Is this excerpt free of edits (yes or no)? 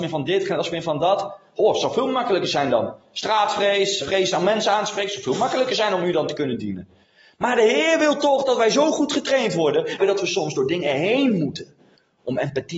no